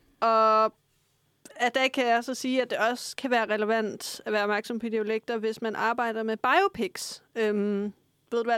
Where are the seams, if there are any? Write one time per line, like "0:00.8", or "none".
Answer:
none